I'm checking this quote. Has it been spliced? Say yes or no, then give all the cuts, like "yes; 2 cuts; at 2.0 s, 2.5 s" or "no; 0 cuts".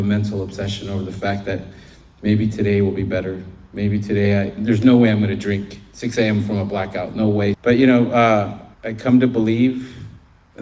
yes; 2 cuts; at 7.5 s, 8.7 s